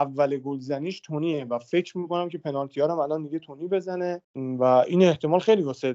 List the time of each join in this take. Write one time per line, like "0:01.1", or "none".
0:04.2